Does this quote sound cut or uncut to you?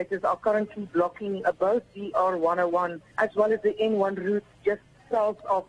cut